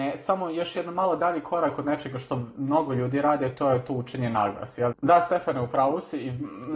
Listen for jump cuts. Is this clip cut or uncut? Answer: cut